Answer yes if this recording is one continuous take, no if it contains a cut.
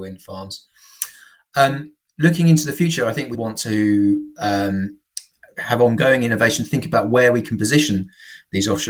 no